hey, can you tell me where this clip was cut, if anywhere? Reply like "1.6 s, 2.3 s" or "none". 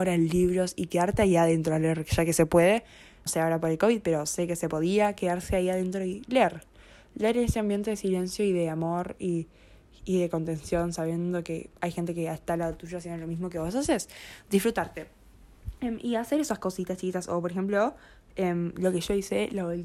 3.3 s